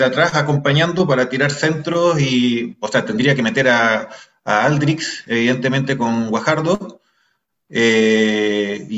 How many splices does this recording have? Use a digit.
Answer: 0